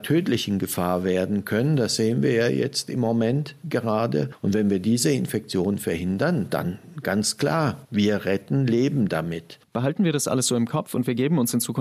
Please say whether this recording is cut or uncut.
cut